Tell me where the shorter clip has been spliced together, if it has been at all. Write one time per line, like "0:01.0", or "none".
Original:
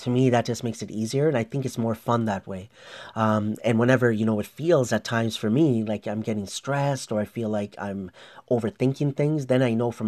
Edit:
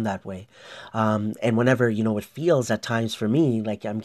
none